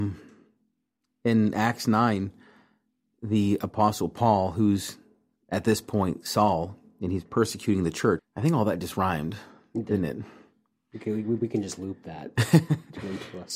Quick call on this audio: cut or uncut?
cut